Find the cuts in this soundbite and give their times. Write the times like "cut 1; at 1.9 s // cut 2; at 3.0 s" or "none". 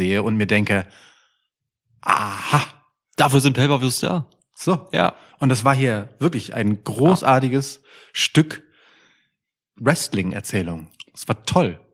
cut 1; at 6.5 s